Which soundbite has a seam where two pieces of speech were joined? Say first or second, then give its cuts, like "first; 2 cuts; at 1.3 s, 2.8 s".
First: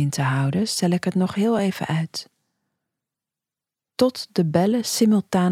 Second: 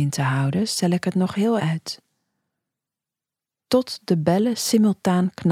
second; 1 cut; at 1.6 s